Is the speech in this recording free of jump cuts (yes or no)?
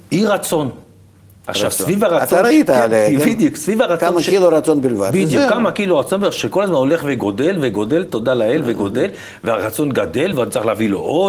yes